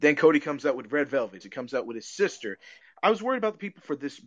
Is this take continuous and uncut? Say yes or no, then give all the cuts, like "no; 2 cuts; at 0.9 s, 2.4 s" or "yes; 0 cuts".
no; 2 cuts; at 1.4 s, 2.8 s